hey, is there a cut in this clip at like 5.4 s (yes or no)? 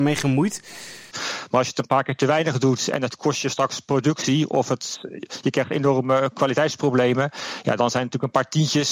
no